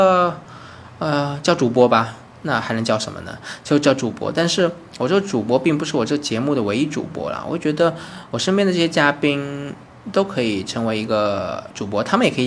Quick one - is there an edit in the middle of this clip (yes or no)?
no